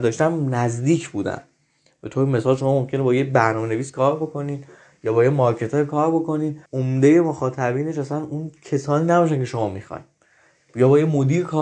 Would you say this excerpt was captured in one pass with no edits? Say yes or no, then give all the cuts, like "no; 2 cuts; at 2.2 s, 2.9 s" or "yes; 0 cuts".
no; 1 cut; at 6.7 s